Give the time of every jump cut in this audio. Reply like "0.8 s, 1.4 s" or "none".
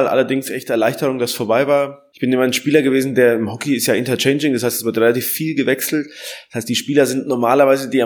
none